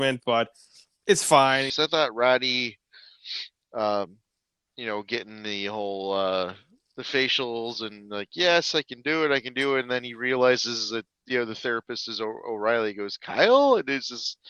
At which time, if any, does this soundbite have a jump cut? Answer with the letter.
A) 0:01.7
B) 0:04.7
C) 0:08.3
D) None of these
A